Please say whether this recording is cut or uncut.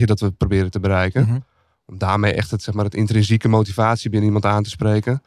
uncut